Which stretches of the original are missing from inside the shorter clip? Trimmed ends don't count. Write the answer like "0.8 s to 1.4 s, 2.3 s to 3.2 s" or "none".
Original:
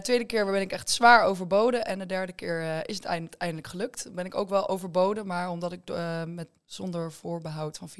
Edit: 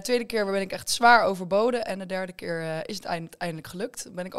none

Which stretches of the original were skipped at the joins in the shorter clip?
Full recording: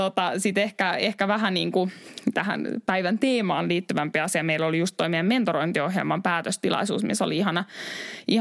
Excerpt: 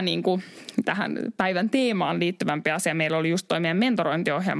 none

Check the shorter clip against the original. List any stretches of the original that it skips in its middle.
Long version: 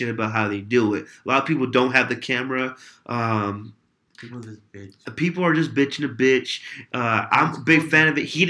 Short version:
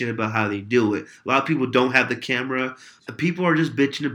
3.0 s to 5.0 s

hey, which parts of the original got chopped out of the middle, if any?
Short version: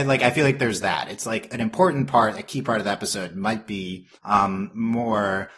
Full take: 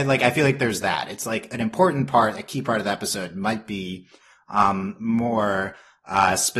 4.2 s to 4.4 s

